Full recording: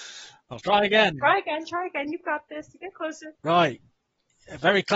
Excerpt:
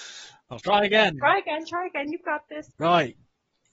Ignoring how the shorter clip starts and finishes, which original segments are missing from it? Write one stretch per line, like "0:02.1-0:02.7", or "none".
0:02.7-0:03.4